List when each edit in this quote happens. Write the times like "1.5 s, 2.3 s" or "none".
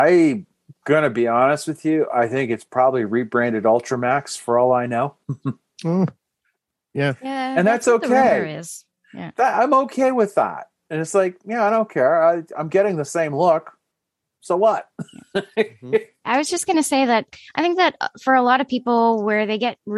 none